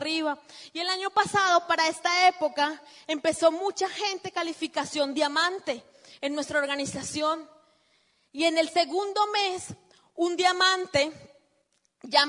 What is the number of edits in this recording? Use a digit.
0